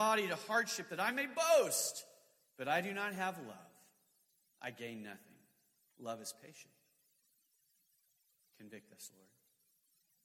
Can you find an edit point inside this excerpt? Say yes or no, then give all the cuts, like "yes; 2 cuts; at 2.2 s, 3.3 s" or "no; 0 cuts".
no; 0 cuts